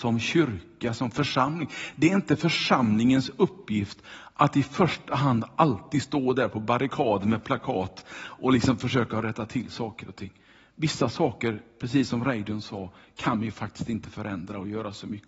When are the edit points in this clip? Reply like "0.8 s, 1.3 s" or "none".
none